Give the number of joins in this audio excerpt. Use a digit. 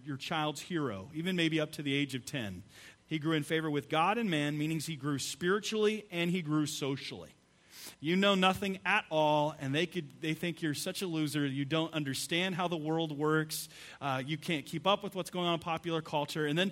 2